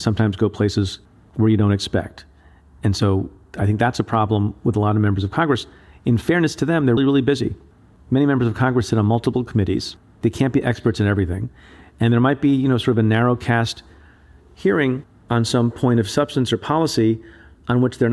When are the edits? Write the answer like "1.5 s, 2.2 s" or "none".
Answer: 7.0 s